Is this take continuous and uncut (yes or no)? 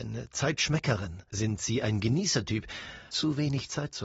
no